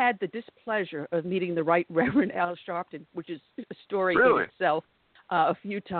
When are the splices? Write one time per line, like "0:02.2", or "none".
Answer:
none